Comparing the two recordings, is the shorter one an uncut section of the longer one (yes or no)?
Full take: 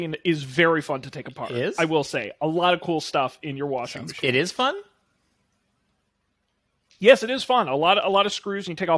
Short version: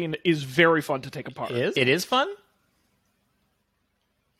no